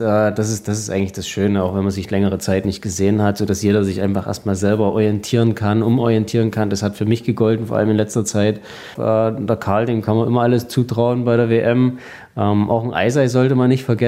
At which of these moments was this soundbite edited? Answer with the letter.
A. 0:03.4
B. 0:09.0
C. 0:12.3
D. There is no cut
B